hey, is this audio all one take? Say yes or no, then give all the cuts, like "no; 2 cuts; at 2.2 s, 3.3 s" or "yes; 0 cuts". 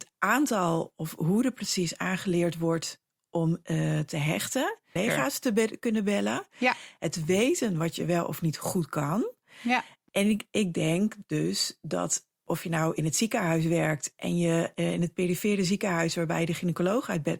no; 1 cut; at 5.0 s